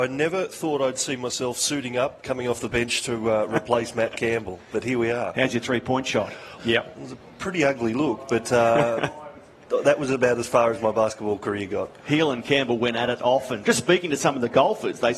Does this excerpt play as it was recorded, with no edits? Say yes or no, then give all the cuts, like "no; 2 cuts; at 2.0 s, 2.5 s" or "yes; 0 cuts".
no; 2 cuts; at 6.6 s, 13.6 s